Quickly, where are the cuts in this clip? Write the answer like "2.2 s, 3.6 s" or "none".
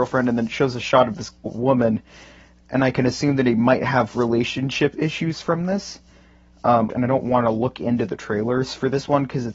1.5 s, 6.9 s